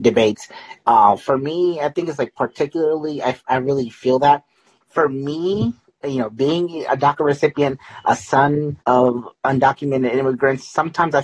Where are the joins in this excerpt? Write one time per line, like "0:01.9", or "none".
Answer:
0:04.8
0:08.8